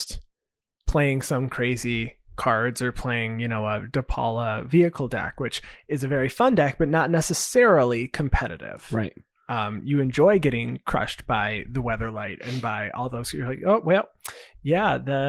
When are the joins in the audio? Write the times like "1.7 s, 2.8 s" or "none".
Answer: none